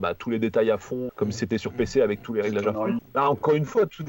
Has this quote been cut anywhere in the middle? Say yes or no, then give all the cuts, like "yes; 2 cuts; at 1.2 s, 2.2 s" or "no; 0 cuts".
yes; 2 cuts; at 1.1 s, 3.0 s